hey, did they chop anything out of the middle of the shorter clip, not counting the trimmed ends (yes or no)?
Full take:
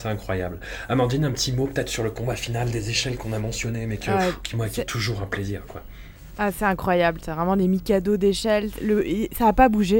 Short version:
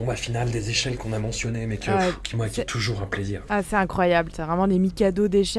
yes